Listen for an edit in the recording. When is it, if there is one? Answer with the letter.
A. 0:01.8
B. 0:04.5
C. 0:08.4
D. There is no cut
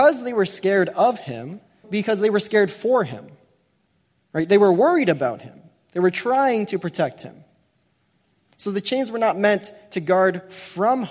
A